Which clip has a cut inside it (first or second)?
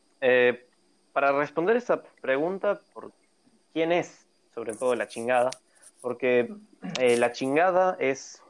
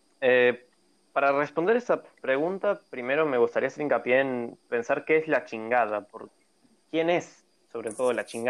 first